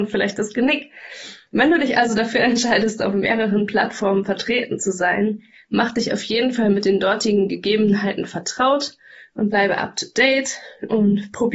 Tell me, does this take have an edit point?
no; 0 cuts

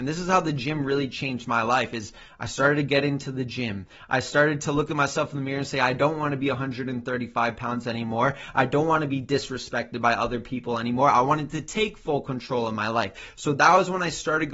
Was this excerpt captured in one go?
yes; 0 cuts

